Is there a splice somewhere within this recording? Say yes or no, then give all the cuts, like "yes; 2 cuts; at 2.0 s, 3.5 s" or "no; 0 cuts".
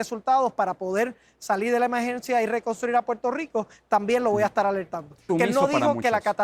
yes; 1 cut; at 5.3 s